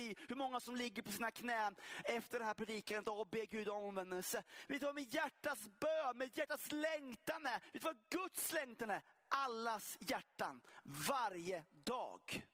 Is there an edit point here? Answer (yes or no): no